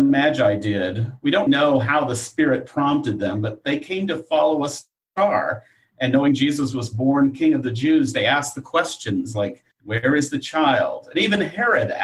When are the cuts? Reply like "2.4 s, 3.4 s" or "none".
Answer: 1.5 s, 9.7 s